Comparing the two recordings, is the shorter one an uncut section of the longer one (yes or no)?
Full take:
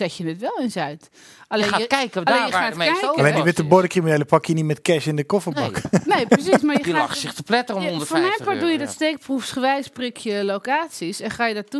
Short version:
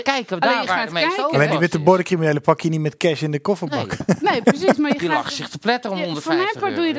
yes